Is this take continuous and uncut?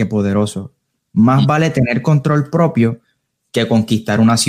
yes; 0 cuts

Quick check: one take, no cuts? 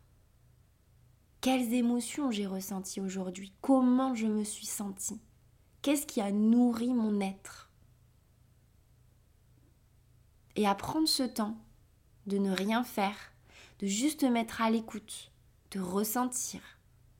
yes; 0 cuts

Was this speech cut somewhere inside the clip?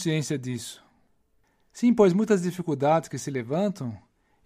no; 0 cuts

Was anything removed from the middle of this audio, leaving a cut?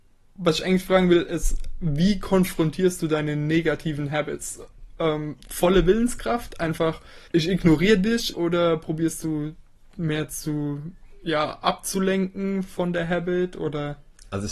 yes; 2 cuts; at 7.3 s, 8.3 s

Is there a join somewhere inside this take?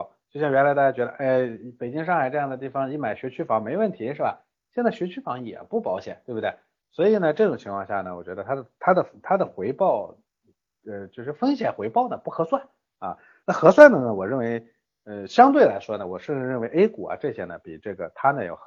no; 0 cuts

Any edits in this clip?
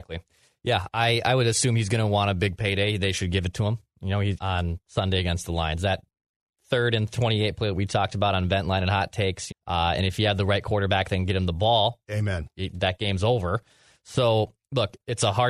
yes; 2 cuts; at 4.4 s, 9.5 s

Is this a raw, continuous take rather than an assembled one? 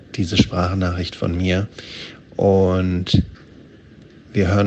yes; 0 cuts

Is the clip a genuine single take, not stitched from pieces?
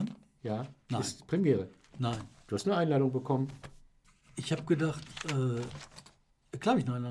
yes; 0 cuts

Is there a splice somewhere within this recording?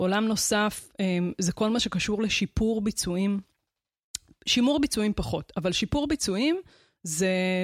no; 0 cuts

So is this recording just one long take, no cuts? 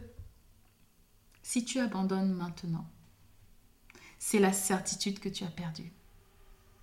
yes; 0 cuts

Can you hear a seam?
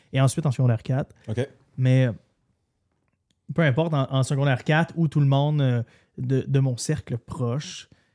no; 0 cuts

